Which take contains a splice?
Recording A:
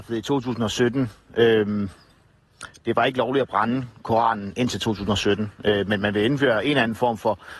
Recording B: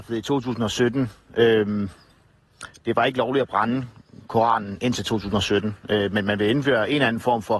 A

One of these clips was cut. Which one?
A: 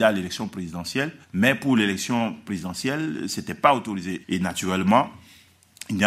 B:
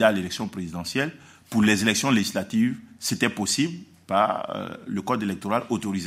A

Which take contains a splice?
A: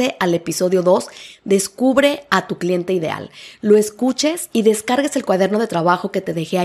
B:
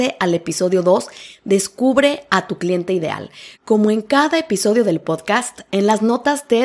B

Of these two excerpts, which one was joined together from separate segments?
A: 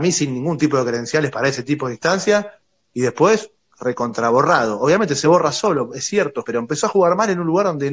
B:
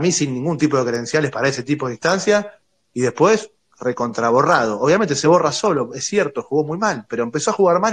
A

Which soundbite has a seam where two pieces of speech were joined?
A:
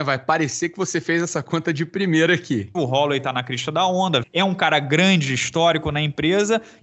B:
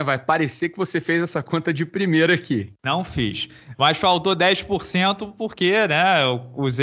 A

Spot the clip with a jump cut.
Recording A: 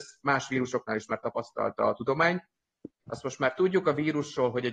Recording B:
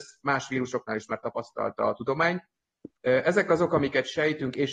A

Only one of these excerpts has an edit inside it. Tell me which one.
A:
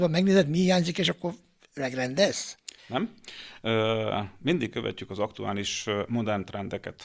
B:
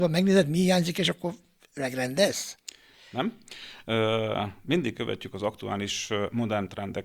A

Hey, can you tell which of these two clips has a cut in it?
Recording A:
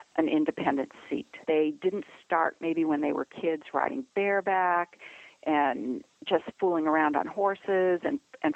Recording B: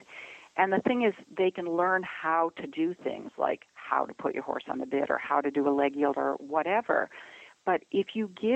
A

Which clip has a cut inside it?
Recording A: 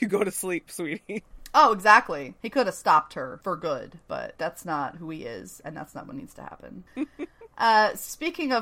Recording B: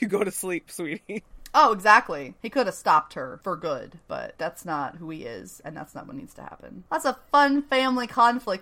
A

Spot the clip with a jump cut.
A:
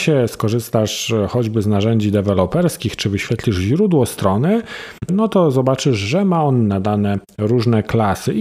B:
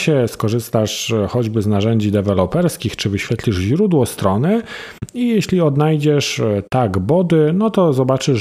A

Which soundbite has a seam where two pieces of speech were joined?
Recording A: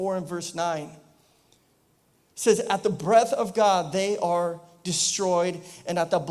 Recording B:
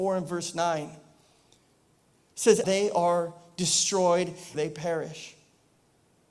B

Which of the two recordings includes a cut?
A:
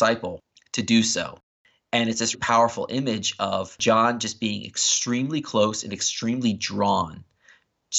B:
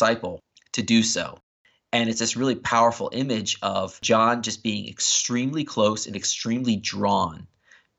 A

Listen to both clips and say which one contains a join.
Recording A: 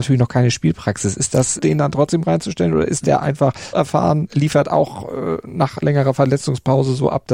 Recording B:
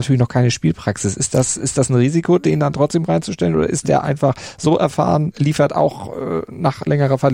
A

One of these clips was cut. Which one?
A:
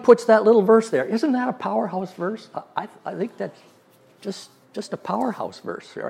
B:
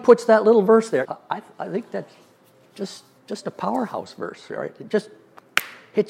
B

